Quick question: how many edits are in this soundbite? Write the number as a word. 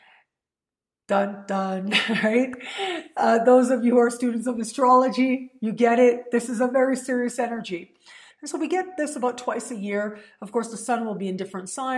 one